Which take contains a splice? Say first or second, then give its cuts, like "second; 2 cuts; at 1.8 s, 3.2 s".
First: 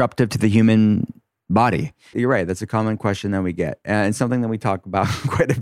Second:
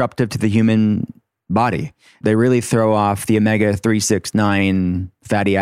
first; 1 cut; at 2.1 s